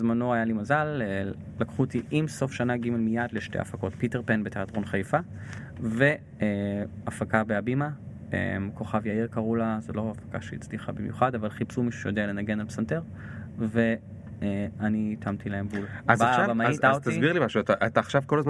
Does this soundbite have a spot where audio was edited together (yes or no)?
yes